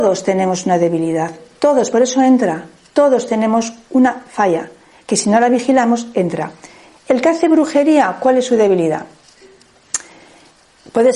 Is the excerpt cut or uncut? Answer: uncut